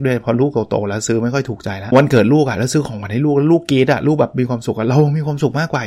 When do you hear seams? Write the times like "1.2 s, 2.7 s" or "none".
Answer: 1.9 s